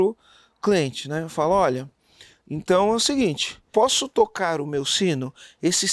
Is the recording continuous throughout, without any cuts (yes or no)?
yes